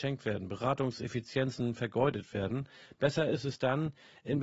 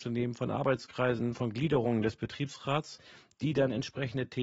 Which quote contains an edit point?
second; 1 cut; at 1.3 s

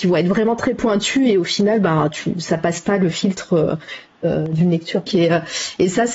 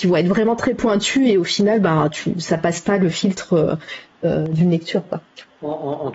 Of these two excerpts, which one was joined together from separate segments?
first; 1 cut; at 5.1 s

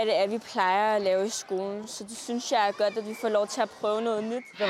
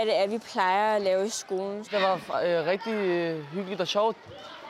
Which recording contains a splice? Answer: second; 1 cut; at 1.8 s

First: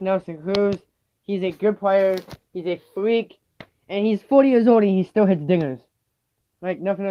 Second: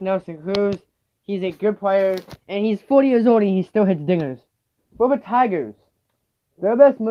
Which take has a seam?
second; 2 cuts; at 2.4 s, 4.8 s

